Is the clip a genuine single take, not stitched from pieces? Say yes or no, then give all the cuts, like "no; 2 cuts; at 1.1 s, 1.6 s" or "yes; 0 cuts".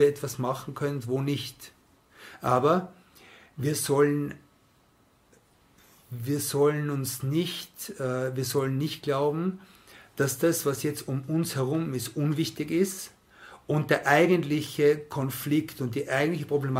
yes; 0 cuts